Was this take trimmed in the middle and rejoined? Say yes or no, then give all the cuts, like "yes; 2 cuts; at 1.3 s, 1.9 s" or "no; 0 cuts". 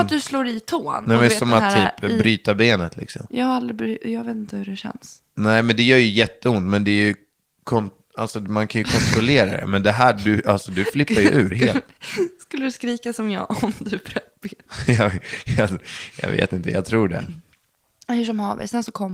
no; 0 cuts